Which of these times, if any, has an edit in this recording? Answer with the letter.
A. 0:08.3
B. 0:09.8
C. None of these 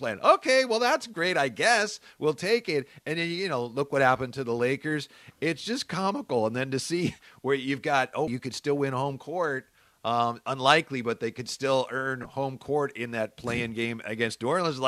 A